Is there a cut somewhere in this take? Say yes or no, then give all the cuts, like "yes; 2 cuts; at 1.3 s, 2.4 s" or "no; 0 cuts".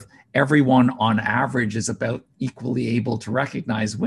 no; 0 cuts